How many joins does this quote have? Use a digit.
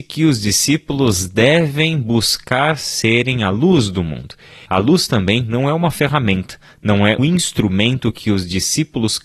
2